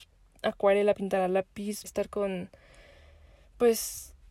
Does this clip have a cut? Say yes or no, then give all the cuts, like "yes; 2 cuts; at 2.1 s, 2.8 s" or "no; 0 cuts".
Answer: yes; 1 cut; at 1.8 s